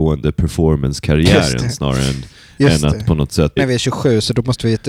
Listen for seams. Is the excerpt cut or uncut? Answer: cut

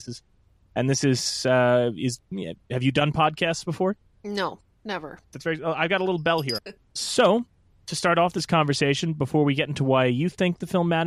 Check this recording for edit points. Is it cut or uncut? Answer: cut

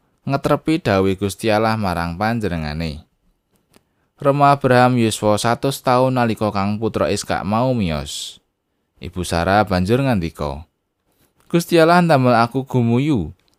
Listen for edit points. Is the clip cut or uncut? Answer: uncut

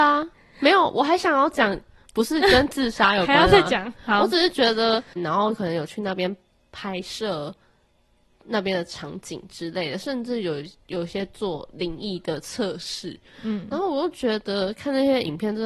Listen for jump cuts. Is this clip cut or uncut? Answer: cut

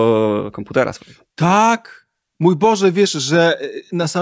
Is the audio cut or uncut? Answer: uncut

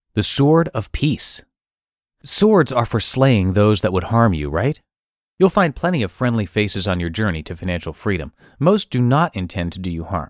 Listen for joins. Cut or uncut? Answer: uncut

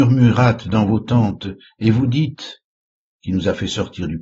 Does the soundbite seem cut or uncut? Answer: cut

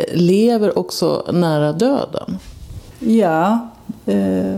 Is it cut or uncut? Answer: uncut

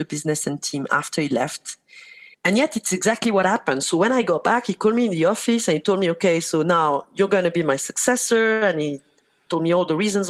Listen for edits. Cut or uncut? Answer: cut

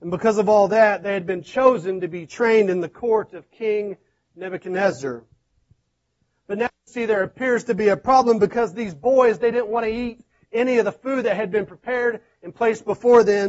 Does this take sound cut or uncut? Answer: uncut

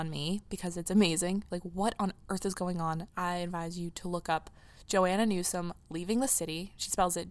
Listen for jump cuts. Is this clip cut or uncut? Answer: cut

